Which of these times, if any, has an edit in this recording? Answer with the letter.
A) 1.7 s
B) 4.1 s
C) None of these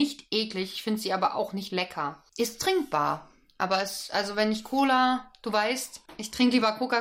A